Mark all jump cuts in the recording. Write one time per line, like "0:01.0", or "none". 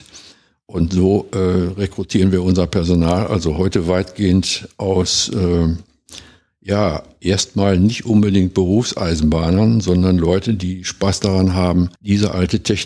0:12.0

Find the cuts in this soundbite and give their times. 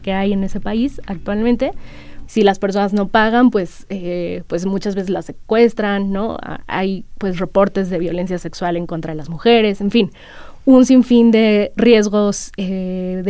0:02.2

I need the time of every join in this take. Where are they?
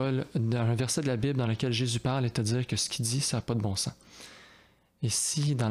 none

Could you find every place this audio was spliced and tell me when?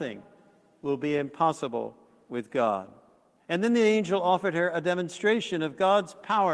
0:03.4

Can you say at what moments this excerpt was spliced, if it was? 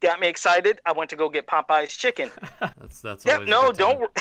0:02.7

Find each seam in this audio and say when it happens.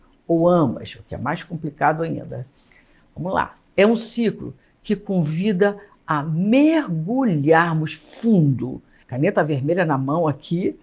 none

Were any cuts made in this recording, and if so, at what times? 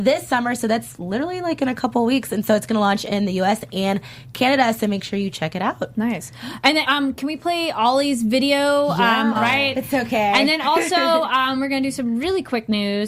0:06.8
0:09.3

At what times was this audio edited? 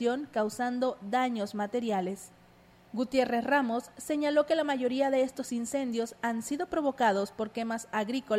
0:02.8

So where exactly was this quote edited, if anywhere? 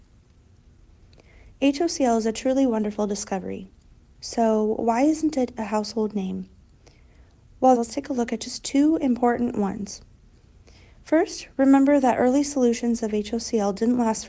0:07.7

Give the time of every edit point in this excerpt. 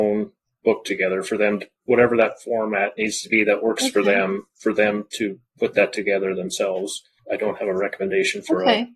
none

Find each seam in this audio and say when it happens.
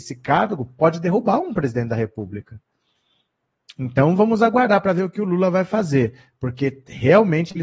none

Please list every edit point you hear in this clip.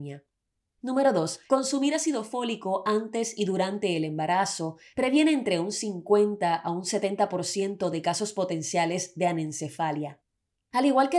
0:01.5

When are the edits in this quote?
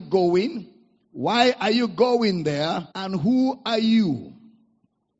0:02.9

